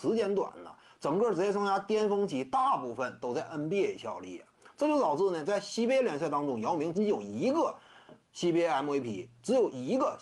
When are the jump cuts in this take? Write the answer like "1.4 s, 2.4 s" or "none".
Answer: 6.9 s